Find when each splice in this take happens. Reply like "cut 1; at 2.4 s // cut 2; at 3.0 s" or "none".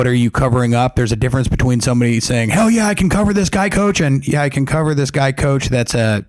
none